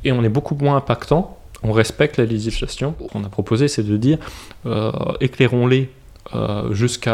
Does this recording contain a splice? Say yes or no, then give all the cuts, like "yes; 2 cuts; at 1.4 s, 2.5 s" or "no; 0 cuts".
yes; 1 cut; at 3.1 s